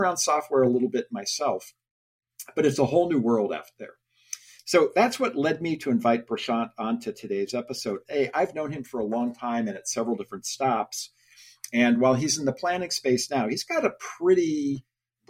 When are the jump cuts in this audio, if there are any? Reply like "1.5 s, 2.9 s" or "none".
4.6 s, 8.0 s